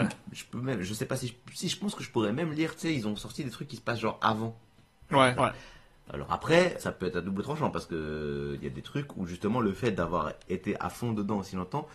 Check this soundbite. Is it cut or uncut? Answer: cut